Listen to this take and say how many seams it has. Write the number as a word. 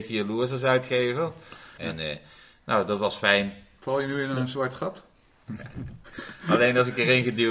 two